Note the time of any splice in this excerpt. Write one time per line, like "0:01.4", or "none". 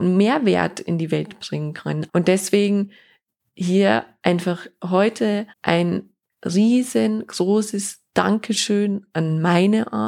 0:02.1
0:05.5